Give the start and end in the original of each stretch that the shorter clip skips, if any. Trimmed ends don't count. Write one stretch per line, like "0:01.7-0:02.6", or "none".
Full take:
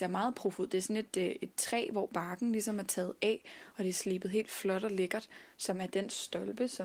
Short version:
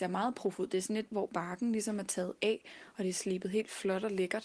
0:01.1-0:01.9